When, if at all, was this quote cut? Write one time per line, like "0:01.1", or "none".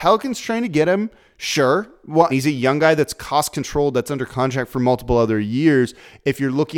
0:02.3